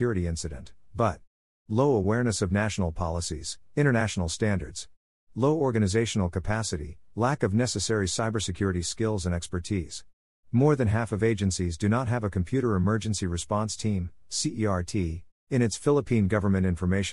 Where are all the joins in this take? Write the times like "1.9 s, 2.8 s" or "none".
15.4 s